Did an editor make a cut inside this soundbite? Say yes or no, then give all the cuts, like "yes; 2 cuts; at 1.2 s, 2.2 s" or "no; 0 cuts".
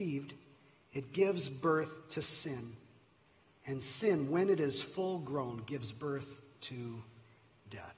no; 0 cuts